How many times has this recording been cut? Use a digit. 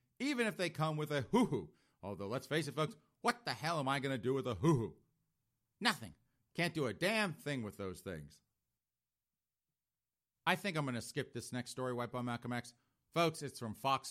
0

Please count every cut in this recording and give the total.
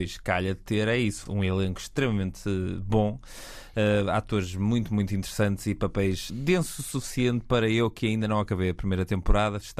1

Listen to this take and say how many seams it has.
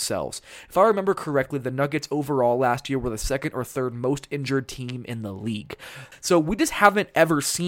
1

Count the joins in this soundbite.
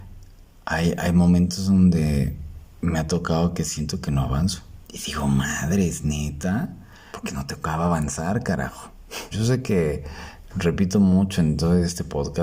3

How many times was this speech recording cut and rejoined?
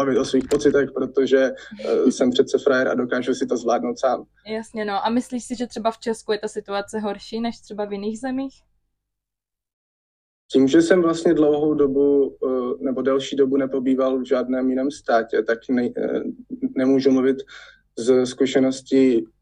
1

